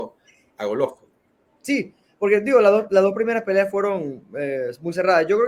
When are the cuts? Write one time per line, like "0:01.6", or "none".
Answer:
none